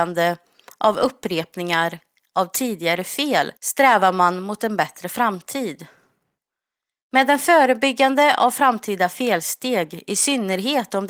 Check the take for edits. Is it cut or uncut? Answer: cut